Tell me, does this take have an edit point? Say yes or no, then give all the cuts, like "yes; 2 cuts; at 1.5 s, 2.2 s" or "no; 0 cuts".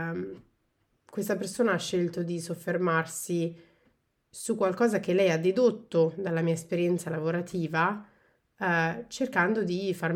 no; 0 cuts